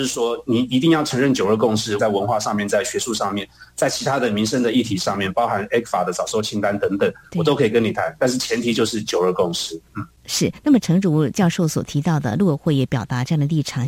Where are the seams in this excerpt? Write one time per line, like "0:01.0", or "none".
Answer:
0:02.0